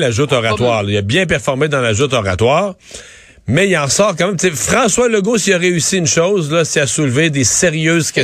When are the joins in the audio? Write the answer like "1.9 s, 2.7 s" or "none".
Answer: none